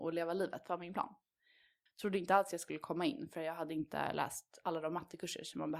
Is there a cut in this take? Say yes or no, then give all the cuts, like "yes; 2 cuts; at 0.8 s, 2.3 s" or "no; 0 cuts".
yes; 1 cut; at 1.9 s